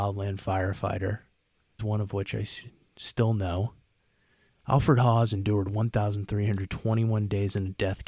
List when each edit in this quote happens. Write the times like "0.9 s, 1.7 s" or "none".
1.8 s, 4.5 s